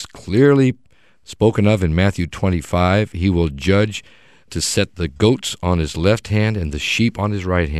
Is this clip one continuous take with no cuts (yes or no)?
yes